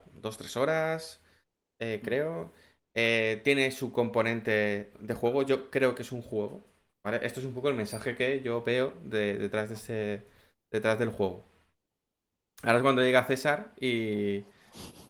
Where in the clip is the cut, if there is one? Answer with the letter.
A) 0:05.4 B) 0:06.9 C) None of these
B